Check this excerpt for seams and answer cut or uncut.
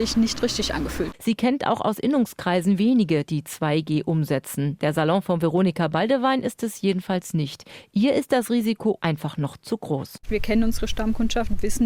cut